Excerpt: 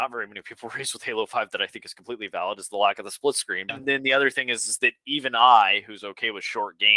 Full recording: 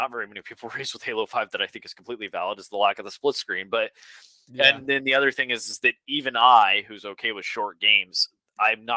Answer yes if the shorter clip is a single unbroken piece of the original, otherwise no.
no